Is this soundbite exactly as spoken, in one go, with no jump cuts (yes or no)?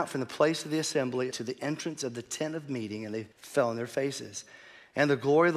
no